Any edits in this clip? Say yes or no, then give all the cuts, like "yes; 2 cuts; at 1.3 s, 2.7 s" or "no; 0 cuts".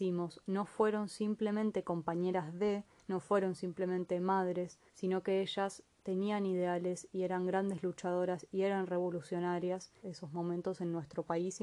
yes; 2 cuts; at 4.9 s, 10.0 s